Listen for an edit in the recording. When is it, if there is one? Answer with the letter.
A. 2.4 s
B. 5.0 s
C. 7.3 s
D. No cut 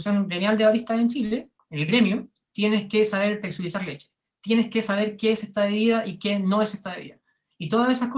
A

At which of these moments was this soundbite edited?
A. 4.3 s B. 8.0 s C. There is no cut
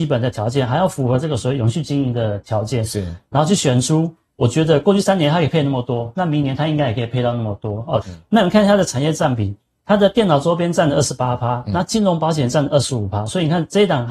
B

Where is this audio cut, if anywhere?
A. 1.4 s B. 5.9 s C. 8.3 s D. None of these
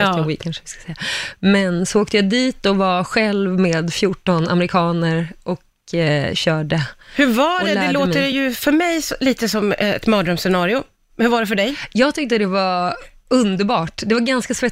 D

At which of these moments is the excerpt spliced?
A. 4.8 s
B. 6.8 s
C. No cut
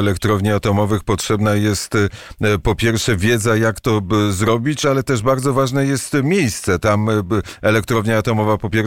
A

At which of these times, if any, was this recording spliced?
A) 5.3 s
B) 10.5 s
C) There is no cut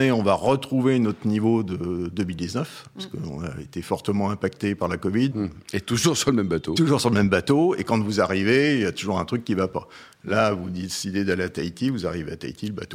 A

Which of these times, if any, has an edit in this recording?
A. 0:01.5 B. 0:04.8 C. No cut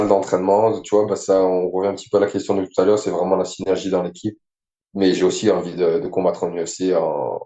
B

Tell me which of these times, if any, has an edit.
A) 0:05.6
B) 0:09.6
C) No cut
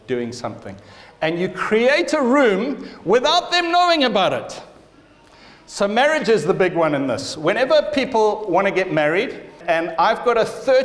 B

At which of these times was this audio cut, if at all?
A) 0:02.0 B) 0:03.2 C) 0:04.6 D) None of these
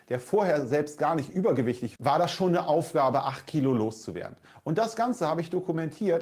A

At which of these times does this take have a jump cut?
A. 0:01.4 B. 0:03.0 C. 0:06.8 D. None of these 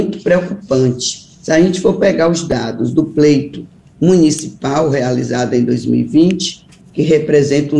C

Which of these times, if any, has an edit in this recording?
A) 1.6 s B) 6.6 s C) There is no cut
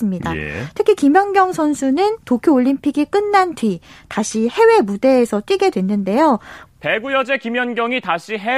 B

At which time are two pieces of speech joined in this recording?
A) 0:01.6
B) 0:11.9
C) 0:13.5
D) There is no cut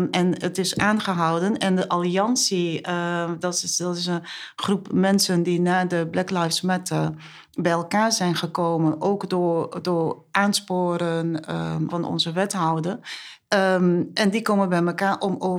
B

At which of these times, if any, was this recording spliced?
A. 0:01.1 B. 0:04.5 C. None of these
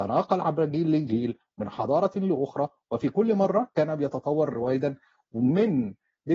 B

